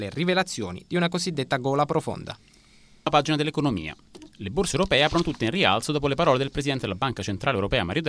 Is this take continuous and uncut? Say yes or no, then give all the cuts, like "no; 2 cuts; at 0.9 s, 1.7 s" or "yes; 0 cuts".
yes; 0 cuts